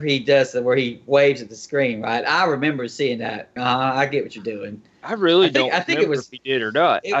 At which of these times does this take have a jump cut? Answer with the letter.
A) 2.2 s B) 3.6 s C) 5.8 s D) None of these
B